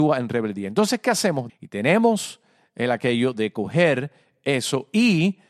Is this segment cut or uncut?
cut